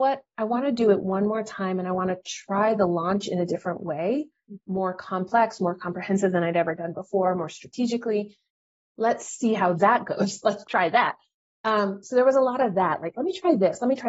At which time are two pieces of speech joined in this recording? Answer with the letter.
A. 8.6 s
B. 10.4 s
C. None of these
C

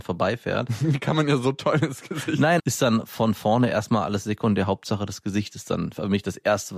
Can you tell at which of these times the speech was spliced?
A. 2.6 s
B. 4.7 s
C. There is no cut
A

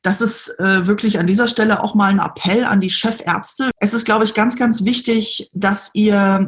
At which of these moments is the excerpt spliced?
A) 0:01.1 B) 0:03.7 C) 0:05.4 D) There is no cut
B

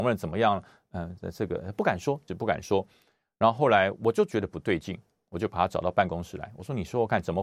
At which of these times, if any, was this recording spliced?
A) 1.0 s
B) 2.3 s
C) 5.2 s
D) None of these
B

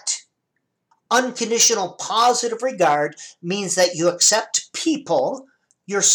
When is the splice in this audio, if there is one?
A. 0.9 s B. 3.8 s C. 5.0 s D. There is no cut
A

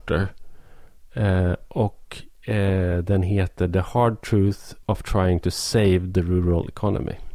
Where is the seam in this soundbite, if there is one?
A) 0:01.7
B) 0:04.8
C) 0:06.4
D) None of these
B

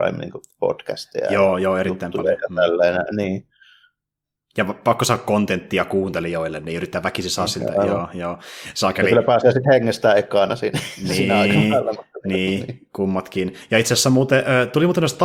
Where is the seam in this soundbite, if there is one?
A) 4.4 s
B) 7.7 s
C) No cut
C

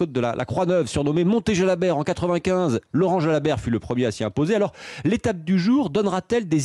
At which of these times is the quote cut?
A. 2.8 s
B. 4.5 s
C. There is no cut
C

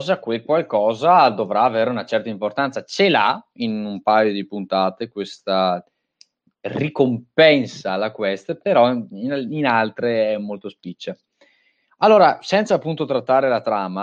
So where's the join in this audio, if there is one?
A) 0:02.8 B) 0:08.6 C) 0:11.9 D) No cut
D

